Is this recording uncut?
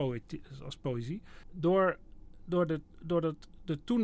no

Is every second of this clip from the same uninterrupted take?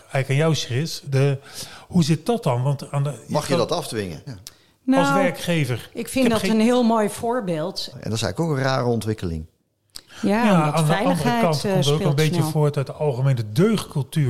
no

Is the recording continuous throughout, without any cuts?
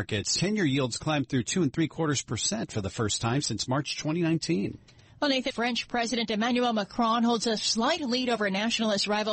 no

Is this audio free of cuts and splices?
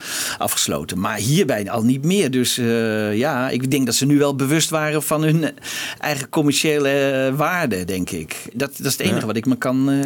yes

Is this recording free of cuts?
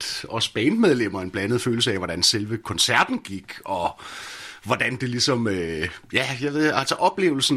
yes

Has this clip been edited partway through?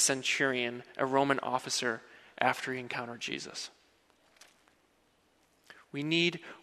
no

